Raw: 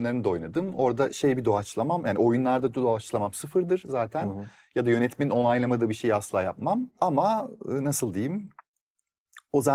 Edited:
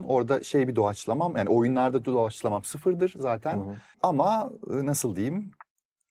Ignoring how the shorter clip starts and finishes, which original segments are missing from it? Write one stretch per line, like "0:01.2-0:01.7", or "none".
0:04.6-0:06.9